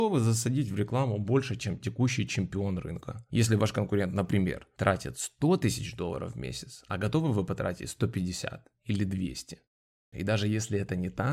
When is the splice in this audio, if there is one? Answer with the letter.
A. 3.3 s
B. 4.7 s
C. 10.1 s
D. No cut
C